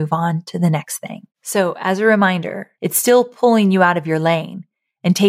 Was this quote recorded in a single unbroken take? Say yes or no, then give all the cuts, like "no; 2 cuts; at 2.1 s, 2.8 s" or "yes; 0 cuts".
no; 2 cuts; at 1.3 s, 2.8 s